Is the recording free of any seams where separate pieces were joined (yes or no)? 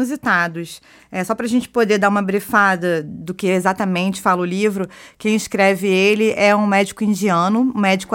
yes